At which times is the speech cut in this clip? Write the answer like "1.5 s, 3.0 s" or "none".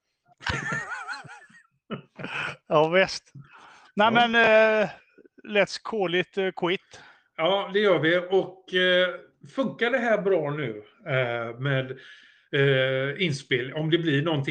none